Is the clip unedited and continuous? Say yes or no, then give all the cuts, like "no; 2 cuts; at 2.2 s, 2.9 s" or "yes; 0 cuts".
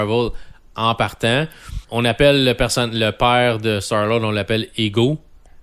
no; 1 cut; at 1.8 s